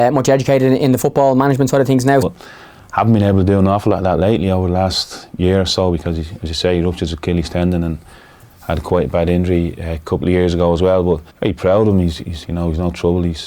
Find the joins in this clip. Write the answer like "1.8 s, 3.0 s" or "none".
2.2 s, 11.3 s, 12.4 s